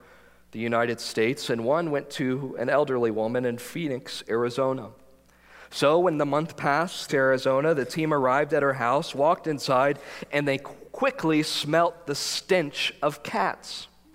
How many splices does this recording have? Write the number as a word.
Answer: one